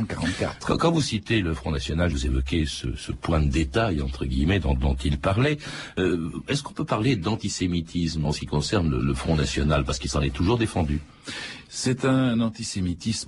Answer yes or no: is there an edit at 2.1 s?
yes